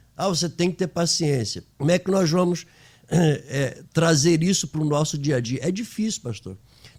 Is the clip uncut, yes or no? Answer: no